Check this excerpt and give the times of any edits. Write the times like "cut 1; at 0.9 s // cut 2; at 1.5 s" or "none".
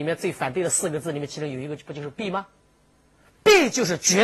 none